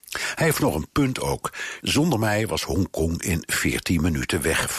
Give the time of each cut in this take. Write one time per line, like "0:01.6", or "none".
0:01.8